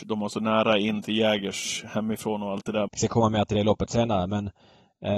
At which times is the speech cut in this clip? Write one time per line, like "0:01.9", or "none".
0:02.9